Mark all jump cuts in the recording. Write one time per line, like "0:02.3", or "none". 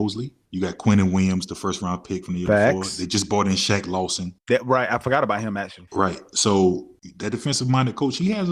none